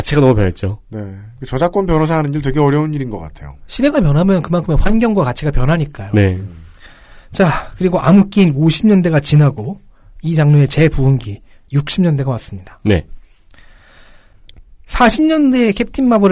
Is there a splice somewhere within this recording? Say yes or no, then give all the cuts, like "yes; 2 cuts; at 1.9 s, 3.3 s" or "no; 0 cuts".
no; 0 cuts